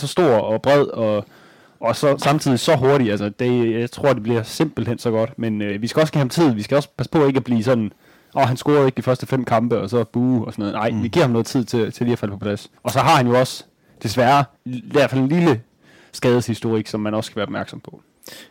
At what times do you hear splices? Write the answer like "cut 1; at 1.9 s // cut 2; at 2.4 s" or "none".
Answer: cut 1; at 12.8 s // cut 2; at 14.6 s